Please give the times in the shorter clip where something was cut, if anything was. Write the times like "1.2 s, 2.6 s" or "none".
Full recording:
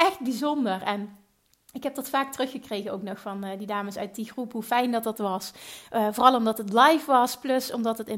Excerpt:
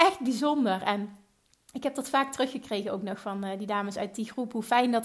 none